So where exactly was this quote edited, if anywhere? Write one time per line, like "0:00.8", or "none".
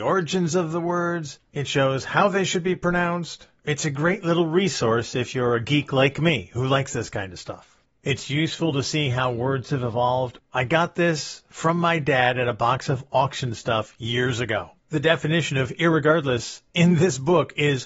0:10.4
0:14.8